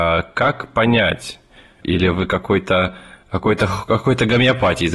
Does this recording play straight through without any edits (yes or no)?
no